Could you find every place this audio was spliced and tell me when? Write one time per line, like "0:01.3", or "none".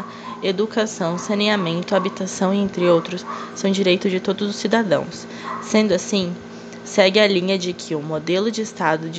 none